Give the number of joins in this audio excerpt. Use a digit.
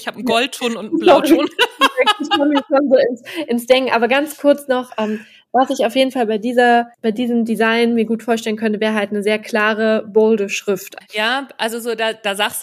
2